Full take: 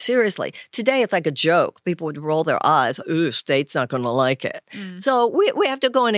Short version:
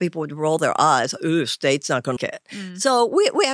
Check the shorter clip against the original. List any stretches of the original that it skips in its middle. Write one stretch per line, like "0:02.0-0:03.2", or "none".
0:04.0-0:04.4

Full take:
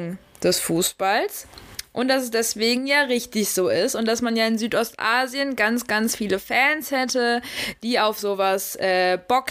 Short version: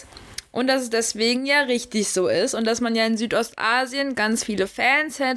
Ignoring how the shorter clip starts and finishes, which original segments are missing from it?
0:05.6-0:05.9

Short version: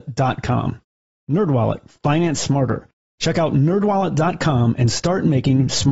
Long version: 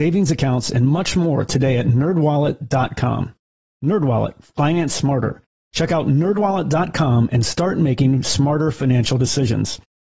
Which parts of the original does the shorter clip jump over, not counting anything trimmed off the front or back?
none

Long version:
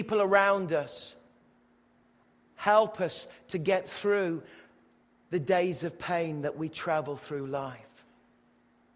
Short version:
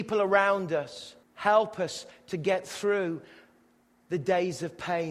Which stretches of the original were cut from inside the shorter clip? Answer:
0:01.2-0:02.4

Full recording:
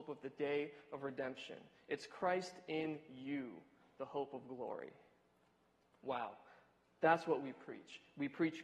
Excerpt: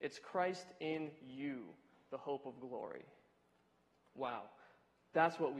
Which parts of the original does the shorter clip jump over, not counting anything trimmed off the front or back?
none

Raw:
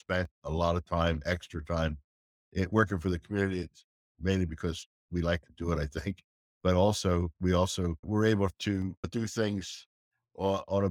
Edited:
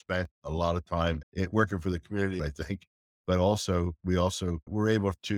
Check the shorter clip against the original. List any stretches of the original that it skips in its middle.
0:01.2-0:02.4
0:03.6-0:05.8

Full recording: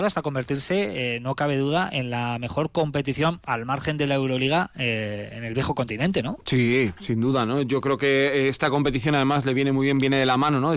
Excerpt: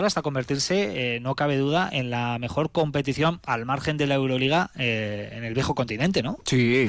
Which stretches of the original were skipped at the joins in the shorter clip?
none

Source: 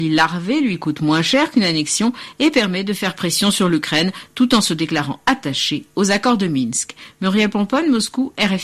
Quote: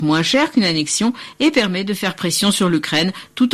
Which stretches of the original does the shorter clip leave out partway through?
none

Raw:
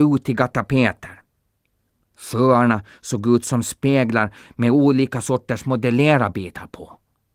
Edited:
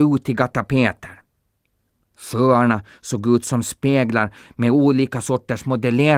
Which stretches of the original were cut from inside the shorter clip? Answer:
none

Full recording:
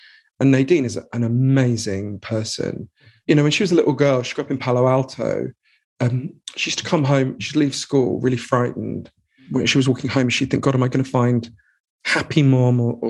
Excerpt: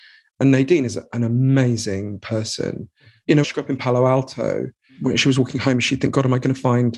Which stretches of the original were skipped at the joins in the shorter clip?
0:03.4-0:04.2
0:05.7-0:09.4

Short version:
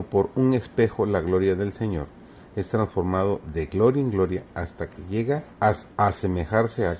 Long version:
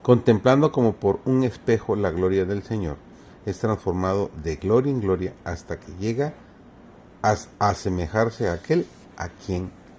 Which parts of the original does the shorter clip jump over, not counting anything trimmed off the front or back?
0:06.4-0:07.1

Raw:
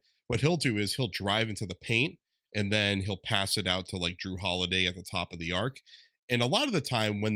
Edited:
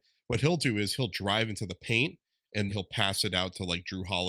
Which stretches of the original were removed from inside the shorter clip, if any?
0:02.7-0:03.0

